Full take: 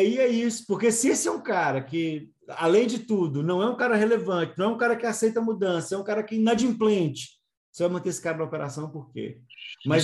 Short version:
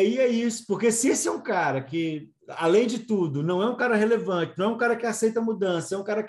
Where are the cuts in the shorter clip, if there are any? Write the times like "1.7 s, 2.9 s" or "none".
none